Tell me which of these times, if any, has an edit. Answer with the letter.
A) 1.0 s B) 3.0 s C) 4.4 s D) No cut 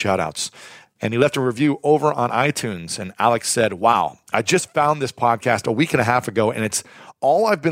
A